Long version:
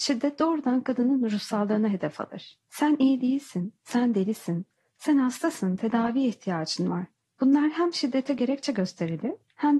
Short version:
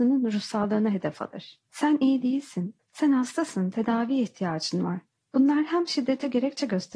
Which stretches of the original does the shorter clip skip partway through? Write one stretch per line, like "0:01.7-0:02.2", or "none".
0:03.8-0:04.9